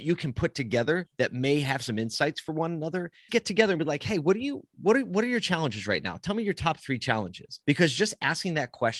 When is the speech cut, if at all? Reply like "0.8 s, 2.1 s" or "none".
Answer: 3.3 s, 7.6 s

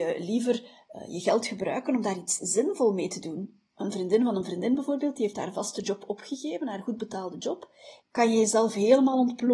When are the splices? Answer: 3.7 s, 8.0 s

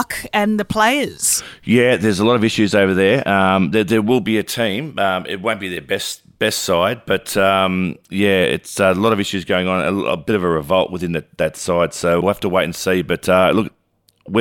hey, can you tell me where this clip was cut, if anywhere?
12.2 s

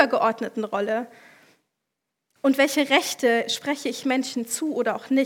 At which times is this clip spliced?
none

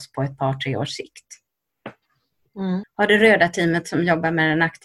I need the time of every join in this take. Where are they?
2.8 s

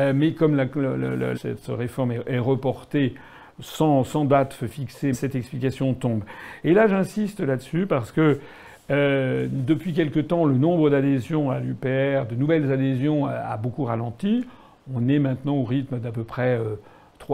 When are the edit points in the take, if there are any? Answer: 1.3 s, 5.1 s, 6.6 s

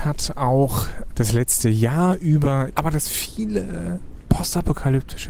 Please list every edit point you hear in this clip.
1.1 s, 2.7 s

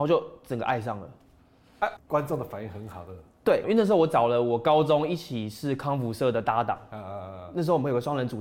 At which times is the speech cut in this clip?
2.0 s, 3.6 s

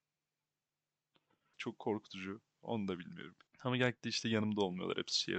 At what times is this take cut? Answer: 1.5 s, 3.5 s

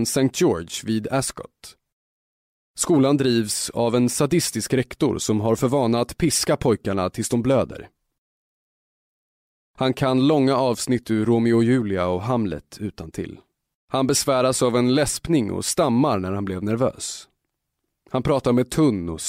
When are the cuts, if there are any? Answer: 9.6 s, 13.8 s

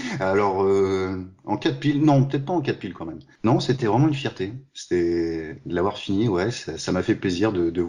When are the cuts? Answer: none

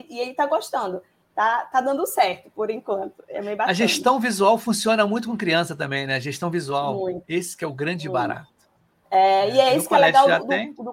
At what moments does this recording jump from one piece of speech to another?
none

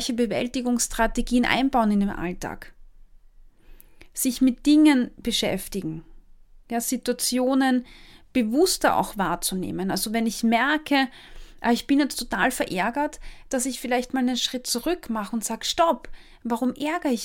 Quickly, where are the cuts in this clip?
none

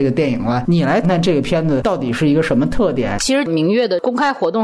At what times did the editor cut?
1.0 s

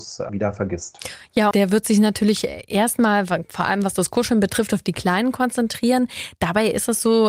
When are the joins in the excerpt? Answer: 1.5 s

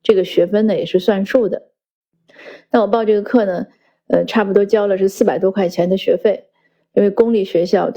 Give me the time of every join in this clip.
none

